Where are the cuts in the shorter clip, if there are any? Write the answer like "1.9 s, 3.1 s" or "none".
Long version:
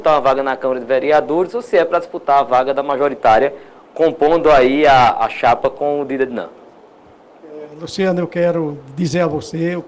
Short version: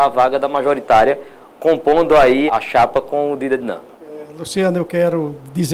2.5 s, 3.9 s